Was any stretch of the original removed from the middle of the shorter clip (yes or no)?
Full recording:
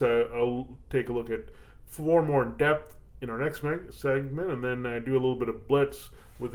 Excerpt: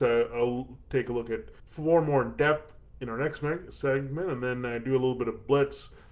yes